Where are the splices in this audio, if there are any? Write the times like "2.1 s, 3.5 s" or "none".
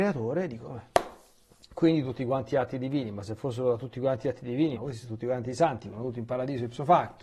4.8 s